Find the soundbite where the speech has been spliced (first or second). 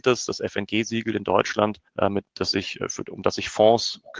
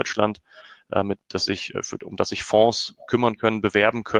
first